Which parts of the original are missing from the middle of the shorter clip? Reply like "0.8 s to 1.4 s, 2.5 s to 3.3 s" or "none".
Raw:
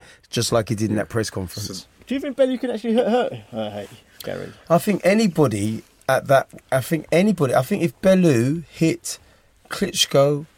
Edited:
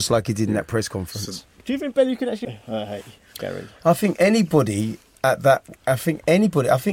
2.9 s to 3.3 s